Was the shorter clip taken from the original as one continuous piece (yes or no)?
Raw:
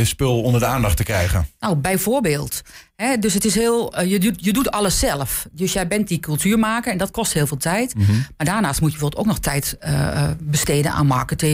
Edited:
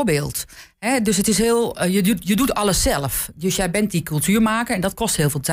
yes